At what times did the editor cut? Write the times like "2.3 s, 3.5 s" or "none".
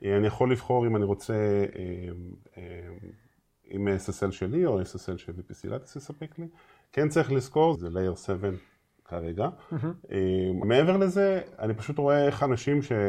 7.7 s, 10.6 s